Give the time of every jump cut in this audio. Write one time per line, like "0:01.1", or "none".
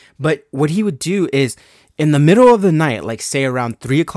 none